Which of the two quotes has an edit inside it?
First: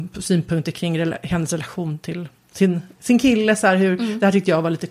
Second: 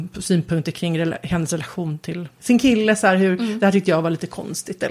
second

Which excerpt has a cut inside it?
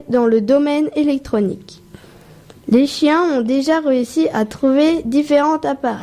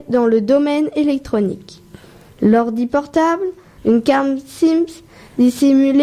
second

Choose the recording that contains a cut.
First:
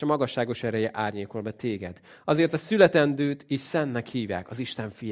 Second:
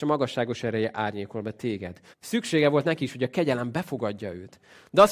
second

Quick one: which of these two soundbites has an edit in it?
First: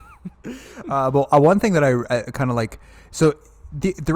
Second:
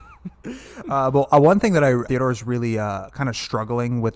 second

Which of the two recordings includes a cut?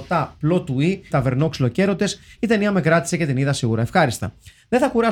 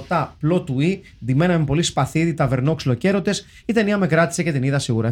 first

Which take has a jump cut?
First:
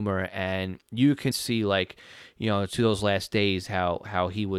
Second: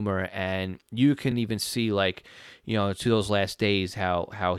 first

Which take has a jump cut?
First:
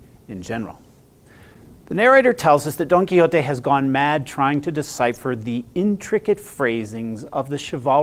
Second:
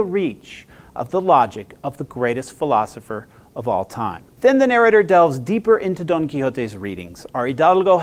second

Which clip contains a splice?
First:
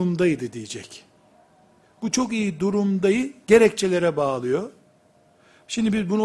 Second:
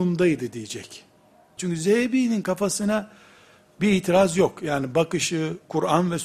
second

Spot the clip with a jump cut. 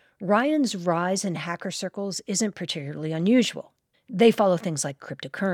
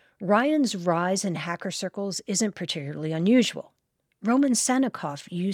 first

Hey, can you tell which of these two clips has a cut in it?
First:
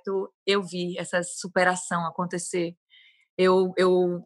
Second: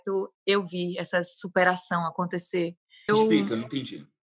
second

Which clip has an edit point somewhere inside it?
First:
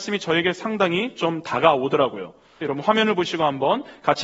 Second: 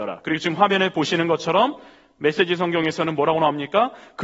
first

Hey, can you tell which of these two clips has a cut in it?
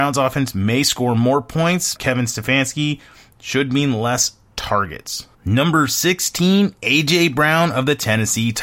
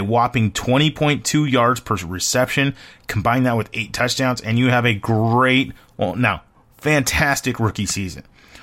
first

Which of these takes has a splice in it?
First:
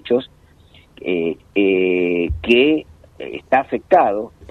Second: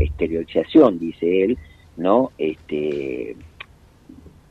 first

